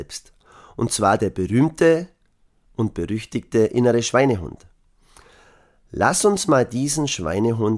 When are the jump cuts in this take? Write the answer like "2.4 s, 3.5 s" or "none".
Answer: none